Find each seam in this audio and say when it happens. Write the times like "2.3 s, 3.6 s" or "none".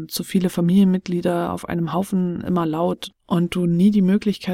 3.1 s